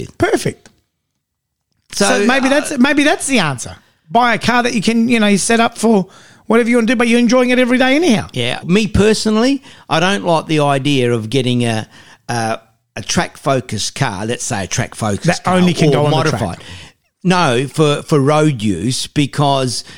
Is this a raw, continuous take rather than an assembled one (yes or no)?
no